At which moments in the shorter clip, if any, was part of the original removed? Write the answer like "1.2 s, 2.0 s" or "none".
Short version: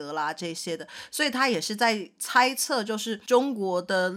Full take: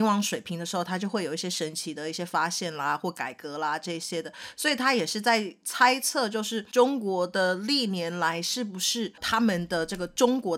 none

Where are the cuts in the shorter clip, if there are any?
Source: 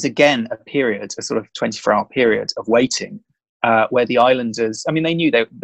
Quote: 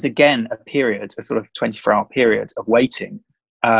none

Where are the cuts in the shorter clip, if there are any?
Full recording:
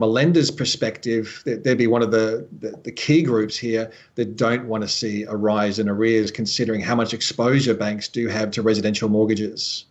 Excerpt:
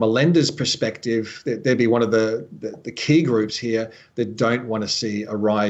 none

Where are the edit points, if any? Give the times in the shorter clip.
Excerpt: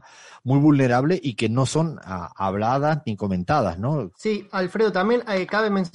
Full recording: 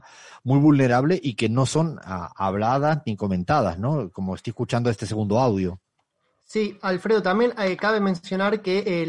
4.1 s

